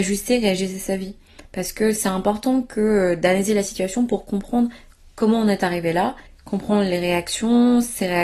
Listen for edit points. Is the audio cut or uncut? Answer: cut